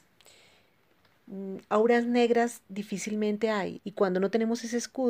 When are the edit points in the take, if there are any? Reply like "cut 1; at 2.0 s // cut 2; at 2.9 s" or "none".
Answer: cut 1; at 3.8 s